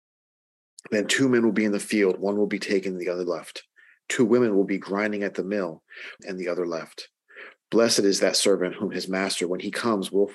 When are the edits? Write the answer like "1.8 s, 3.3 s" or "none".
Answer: 6.2 s, 7.6 s